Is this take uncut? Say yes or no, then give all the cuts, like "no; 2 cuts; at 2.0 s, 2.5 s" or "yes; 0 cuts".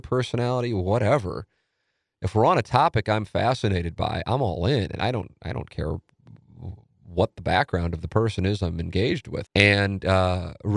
no; 1 cut; at 9.5 s